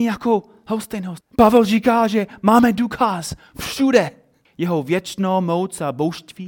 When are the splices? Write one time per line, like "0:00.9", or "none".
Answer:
0:01.2
0:04.5